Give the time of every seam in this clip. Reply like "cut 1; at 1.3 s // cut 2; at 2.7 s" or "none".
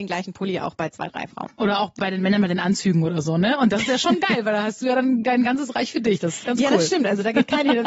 cut 1; at 2.0 s